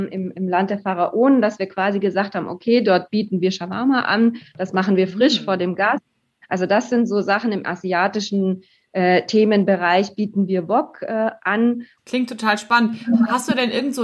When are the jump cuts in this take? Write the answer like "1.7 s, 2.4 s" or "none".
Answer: 12.0 s